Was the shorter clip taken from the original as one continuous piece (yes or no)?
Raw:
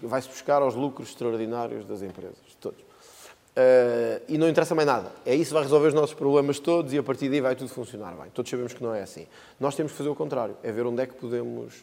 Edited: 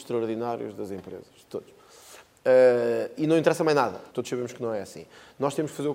no